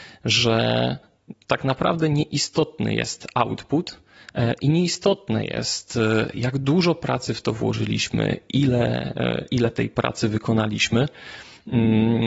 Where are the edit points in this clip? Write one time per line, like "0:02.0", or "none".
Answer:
none